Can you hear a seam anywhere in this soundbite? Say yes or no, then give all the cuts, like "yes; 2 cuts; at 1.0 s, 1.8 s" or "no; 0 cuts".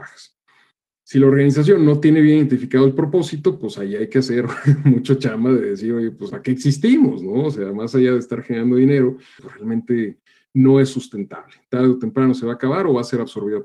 yes; 2 cuts; at 6.3 s, 9.4 s